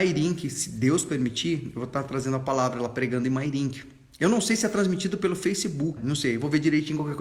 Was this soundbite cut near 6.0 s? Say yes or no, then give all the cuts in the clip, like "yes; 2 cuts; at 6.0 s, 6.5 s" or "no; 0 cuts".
yes; 1 cut; at 6.0 s